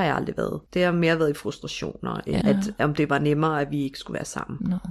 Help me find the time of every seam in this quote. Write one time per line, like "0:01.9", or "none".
0:02.4